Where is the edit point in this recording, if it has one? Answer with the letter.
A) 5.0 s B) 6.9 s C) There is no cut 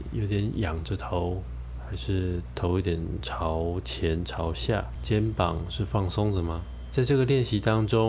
A